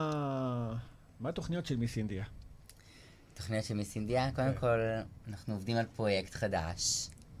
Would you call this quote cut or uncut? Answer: uncut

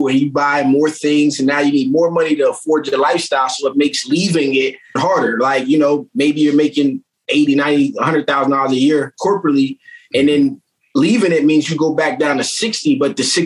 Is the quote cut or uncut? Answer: cut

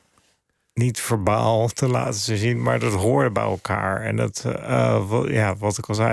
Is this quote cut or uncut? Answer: uncut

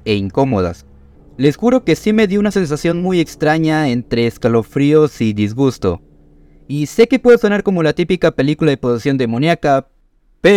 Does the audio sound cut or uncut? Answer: cut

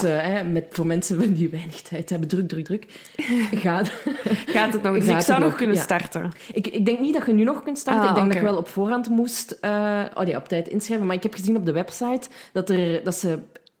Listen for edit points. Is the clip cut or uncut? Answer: uncut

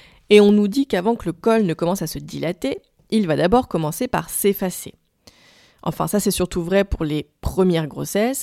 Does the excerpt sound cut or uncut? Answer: uncut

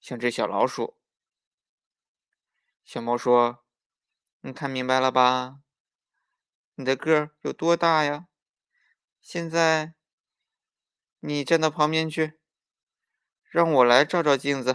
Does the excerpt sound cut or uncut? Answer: uncut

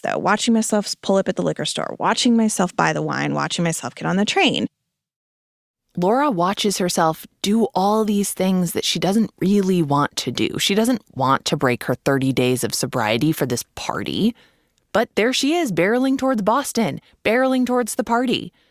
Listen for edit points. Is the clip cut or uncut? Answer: cut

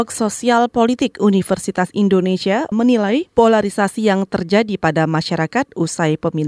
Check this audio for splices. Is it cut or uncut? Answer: cut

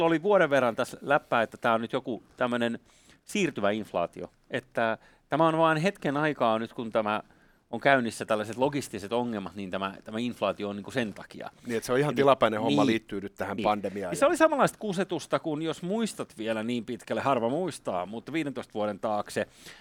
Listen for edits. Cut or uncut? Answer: uncut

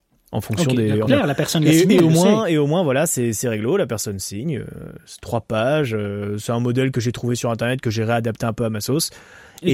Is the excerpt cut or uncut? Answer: cut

